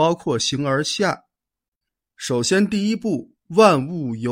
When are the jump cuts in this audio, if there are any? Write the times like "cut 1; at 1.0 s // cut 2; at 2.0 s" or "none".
none